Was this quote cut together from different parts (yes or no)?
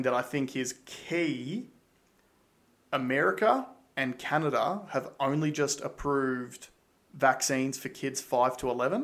no